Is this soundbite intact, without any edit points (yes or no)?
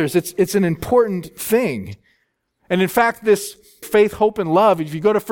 no